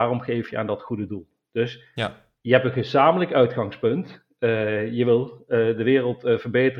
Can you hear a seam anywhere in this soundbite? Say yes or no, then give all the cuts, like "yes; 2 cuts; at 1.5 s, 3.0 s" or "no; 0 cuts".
no; 0 cuts